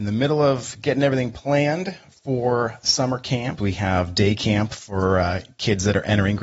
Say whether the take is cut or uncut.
cut